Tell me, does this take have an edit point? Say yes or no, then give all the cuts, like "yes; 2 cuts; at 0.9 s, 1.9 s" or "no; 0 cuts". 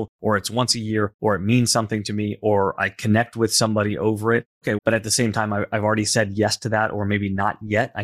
yes; 1 cut; at 4.8 s